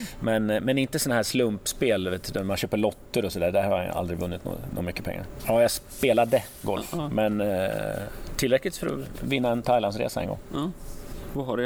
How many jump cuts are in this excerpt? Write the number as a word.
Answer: one